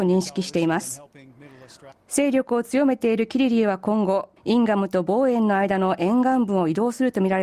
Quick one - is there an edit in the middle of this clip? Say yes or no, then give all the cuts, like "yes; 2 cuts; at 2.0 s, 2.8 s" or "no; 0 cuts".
yes; 2 cuts; at 1.9 s, 4.4 s